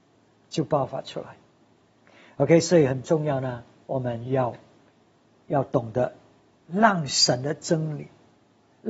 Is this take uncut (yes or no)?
yes